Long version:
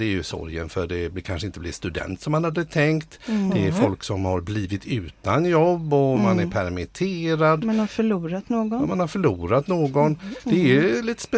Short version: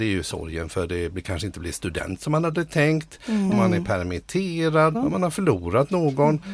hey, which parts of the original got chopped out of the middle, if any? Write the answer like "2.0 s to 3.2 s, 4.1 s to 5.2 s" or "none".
3.5 s to 6.2 s, 7.6 s to 8.7 s